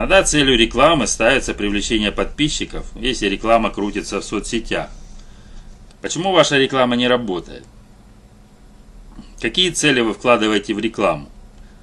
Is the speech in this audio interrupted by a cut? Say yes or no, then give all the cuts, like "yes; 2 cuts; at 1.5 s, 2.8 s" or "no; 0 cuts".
yes; 1 cut; at 5.9 s